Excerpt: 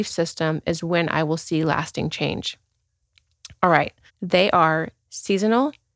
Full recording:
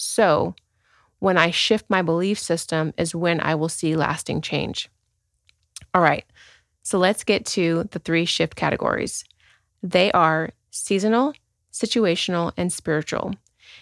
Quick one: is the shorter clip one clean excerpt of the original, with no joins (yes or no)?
no